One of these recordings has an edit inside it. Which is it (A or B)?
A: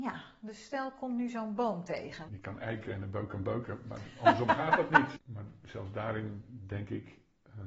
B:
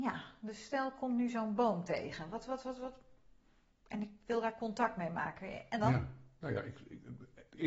A